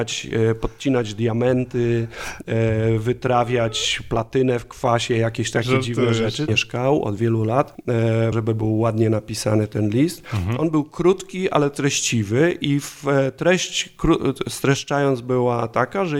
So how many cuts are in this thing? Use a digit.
2